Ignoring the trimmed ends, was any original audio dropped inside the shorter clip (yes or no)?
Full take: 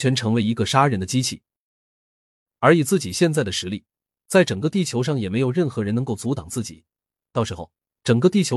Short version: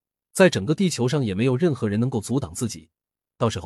no